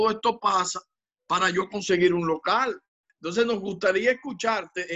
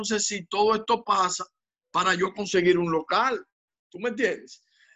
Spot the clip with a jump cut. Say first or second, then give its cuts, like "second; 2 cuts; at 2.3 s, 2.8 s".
first; 1 cut; at 3.1 s